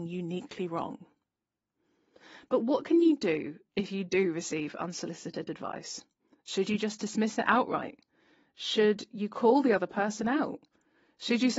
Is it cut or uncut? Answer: uncut